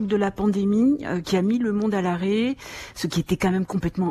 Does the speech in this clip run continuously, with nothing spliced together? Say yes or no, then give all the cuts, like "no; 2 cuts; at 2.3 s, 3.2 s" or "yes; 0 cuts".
yes; 0 cuts